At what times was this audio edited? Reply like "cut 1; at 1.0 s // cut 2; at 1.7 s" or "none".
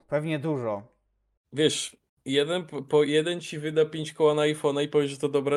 none

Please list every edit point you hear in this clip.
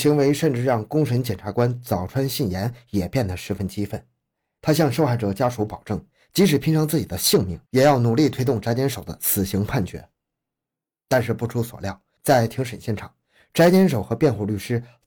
none

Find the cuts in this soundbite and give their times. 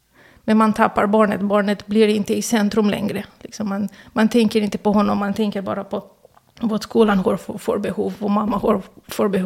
none

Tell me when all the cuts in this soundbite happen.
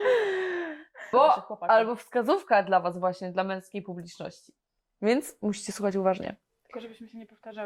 cut 1; at 1.1 s

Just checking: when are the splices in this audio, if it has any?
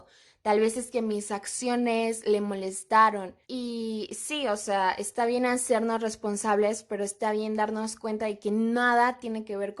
cut 1; at 3.4 s

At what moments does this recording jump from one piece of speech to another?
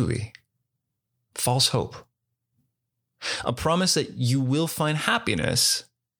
none

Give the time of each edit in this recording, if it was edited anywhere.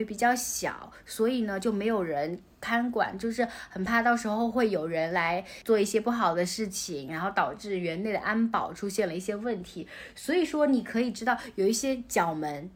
none

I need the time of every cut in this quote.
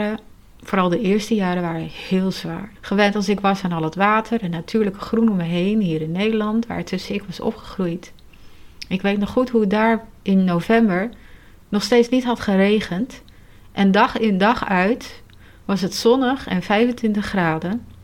cut 1; at 2.8 s

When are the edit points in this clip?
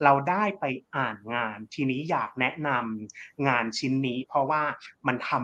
none

